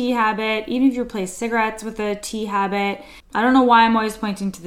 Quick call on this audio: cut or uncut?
cut